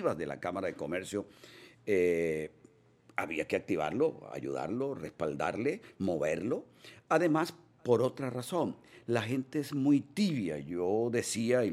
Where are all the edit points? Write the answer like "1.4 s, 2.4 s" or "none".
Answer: none